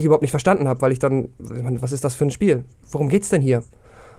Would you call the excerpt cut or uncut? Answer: cut